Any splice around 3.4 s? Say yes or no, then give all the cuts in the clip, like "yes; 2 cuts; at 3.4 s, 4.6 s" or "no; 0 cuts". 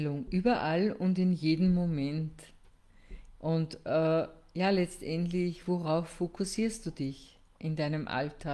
yes; 1 cut; at 3.4 s